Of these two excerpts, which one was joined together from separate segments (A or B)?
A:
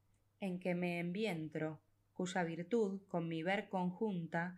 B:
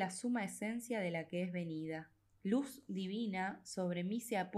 B